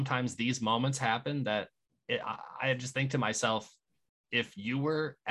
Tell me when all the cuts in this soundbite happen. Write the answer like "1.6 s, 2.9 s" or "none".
none